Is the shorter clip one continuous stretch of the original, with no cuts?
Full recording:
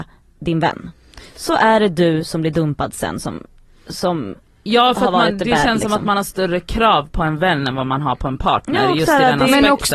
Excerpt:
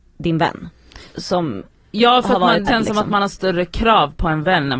no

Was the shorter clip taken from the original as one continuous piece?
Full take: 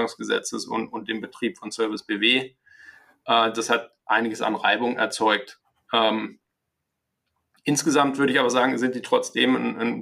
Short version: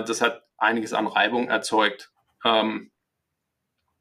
yes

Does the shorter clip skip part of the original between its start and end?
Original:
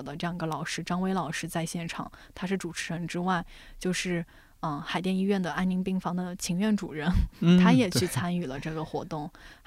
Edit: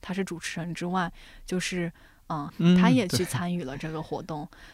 yes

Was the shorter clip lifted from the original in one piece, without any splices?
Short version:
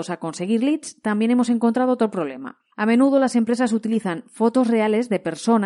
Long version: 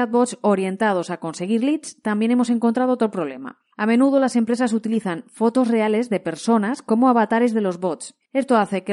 yes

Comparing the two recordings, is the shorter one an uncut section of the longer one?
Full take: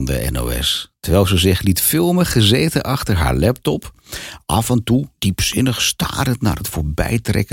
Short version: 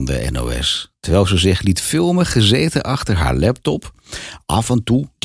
yes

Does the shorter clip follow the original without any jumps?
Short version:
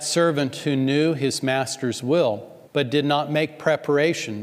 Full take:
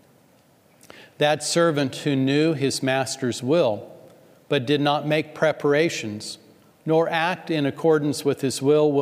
no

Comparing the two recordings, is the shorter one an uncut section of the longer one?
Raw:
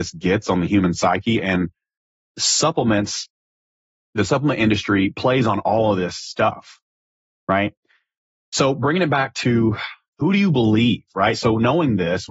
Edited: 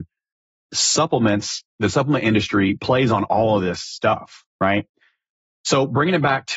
no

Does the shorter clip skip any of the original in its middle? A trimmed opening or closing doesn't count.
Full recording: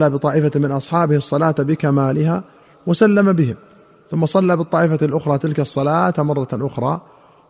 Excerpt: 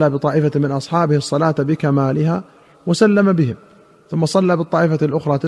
no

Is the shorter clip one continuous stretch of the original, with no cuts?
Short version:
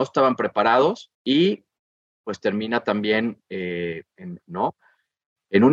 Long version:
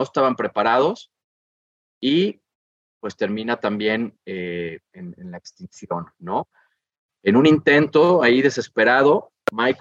no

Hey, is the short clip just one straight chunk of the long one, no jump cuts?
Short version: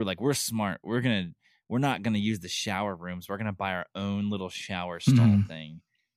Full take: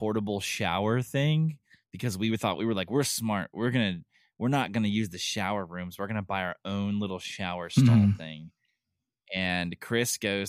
yes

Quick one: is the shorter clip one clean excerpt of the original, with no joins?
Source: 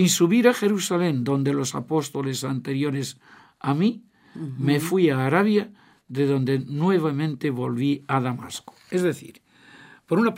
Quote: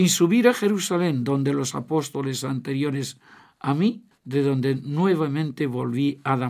no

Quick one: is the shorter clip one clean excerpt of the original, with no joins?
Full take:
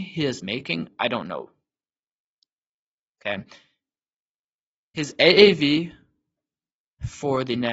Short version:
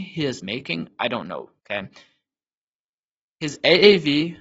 no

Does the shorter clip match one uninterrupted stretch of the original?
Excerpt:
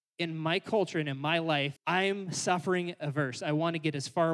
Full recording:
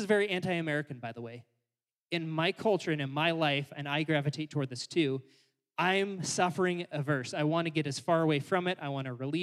no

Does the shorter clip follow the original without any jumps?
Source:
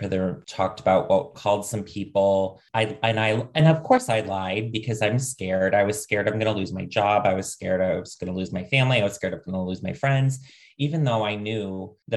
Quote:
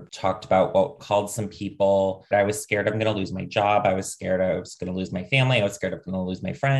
no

